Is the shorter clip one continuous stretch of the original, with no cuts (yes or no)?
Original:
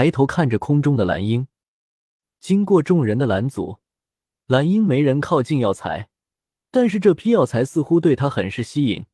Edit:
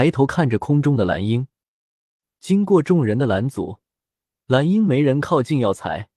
yes